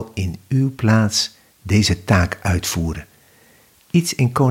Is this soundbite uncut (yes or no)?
yes